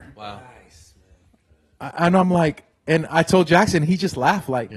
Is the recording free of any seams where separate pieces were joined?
yes; 0 cuts

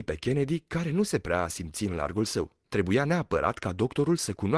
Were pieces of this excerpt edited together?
yes; 1 cut; at 2.6 s

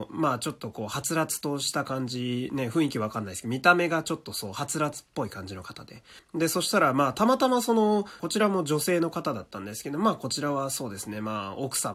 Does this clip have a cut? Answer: yes; 2 cuts; at 6.2 s, 8.2 s

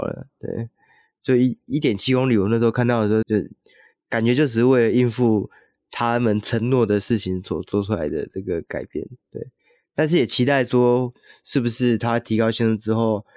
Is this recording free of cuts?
no; 1 cut; at 3.2 s

